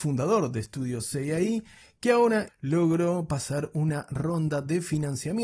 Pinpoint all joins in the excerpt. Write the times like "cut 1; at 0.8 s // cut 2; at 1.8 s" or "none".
cut 1; at 2.5 s